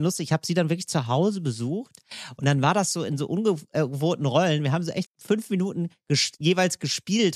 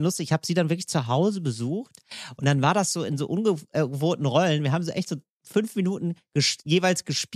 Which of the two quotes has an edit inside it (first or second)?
first